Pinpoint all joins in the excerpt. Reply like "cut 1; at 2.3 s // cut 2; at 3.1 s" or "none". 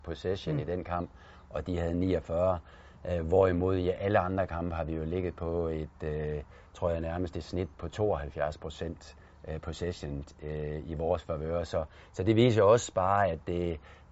cut 1; at 7.7 s